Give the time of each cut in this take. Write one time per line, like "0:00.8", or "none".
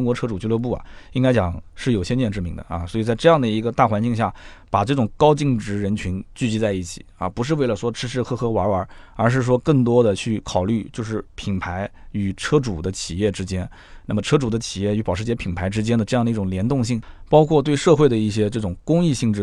none